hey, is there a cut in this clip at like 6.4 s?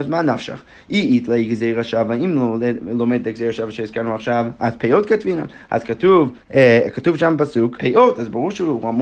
yes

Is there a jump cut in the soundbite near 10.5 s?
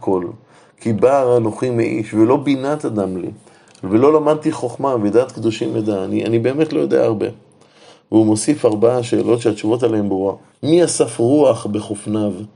yes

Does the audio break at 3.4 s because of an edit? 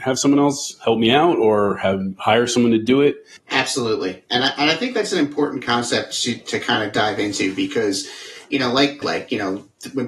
yes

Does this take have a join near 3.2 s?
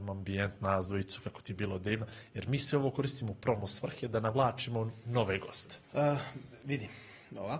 no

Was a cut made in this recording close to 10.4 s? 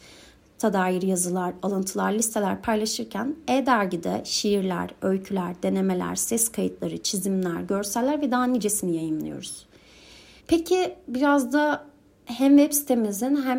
yes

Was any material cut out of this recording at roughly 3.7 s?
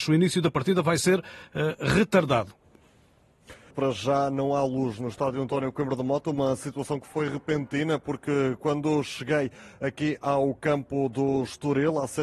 yes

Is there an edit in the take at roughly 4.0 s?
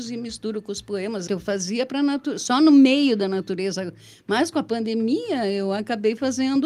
no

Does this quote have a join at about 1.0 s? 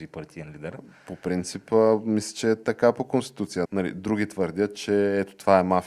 no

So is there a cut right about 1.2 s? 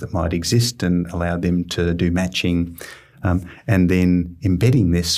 no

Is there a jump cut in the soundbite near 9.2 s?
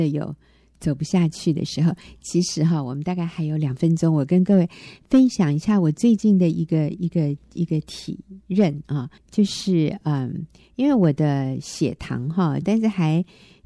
yes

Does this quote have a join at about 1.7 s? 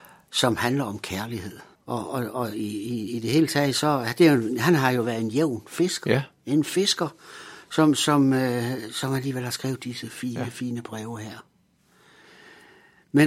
yes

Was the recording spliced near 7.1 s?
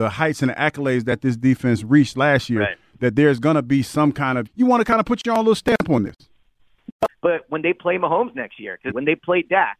yes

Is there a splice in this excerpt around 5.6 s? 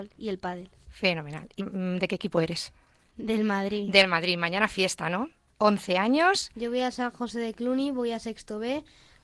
yes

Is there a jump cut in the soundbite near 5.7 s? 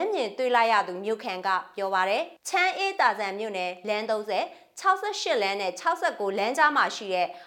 no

